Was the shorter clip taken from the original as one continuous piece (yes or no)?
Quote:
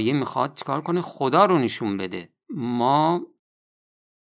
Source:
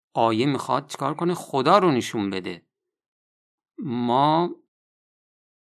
no